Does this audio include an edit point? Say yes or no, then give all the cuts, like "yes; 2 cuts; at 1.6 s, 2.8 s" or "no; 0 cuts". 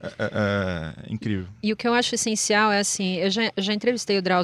no; 0 cuts